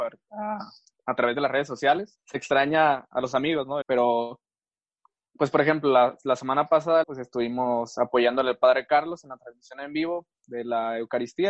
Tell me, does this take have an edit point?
yes; 3 cuts; at 2.2 s, 3.8 s, 7.0 s

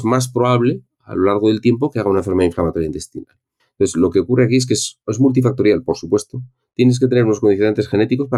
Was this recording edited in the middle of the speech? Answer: yes; 1 cut; at 3.6 s

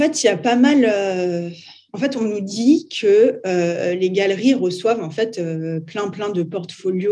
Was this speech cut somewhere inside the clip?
no; 0 cuts

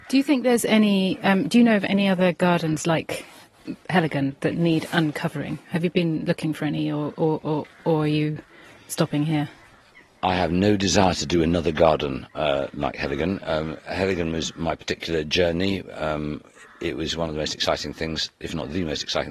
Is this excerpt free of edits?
yes; 0 cuts

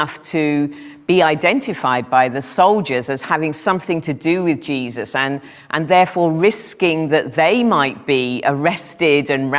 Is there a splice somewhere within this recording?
no; 0 cuts

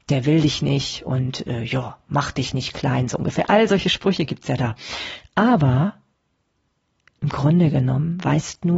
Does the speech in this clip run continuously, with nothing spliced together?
yes; 0 cuts

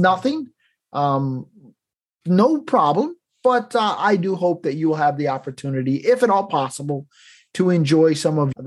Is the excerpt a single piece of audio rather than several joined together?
yes; 0 cuts

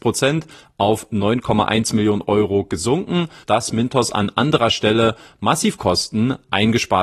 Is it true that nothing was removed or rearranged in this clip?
no; 1 cut; at 3.4 s

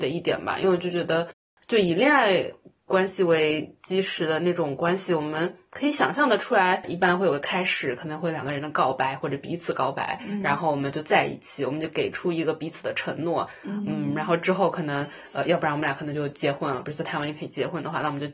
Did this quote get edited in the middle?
no; 0 cuts

